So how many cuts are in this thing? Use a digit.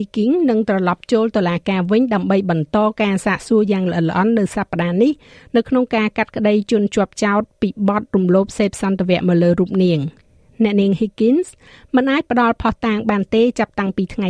0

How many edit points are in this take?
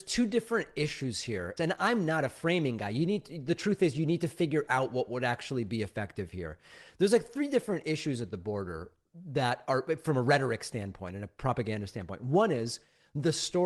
1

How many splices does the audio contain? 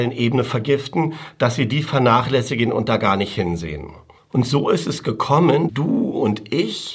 2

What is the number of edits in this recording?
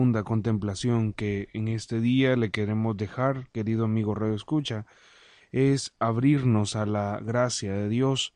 0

